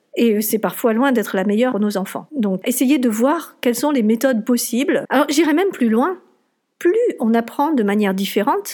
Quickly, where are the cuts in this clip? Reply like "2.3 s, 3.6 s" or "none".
2.7 s, 5.1 s